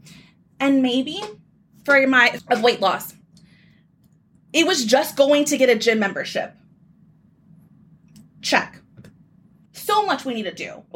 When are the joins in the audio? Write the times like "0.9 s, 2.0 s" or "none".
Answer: 2.4 s, 9.7 s

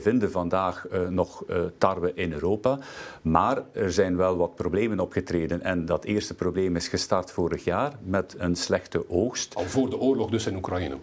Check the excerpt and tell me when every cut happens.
none

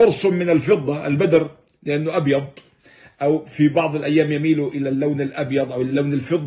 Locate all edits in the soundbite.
none

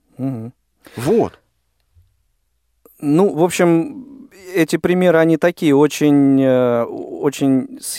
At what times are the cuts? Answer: none

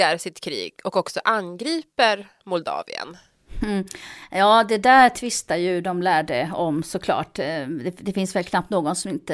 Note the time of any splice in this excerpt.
none

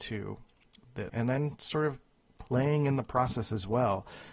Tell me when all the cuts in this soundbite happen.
1.1 s

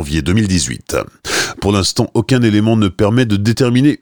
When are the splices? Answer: 1.5 s

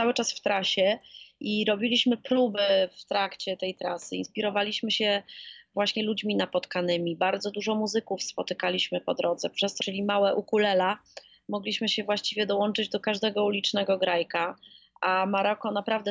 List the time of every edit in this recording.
9.8 s

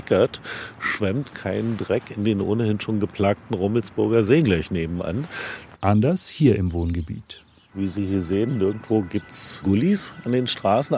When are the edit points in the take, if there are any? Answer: 5.7 s

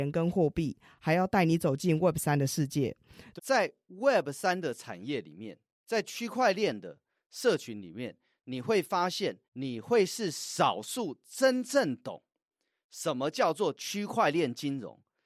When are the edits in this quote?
3.4 s, 9.5 s

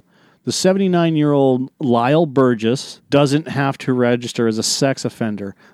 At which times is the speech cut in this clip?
3.0 s

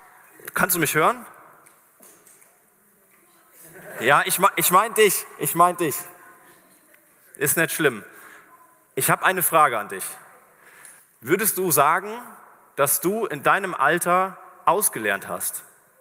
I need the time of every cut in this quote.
none

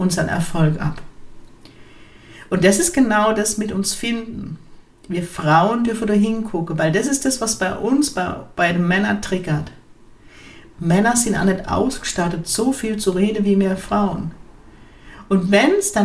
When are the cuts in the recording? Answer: 10.7 s

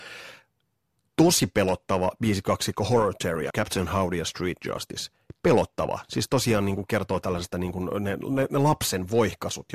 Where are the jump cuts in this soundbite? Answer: 3.5 s

